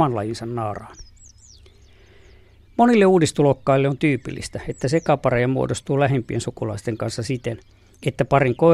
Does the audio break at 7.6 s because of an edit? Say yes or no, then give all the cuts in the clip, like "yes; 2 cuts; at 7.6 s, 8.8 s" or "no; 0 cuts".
no; 0 cuts